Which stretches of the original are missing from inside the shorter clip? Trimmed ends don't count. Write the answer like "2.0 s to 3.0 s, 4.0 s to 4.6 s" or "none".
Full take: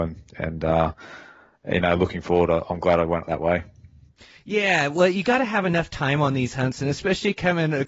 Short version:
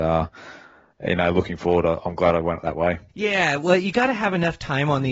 3.7 s to 4.4 s